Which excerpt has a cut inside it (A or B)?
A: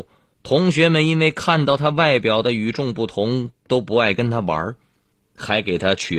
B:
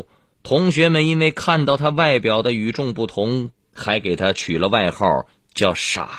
B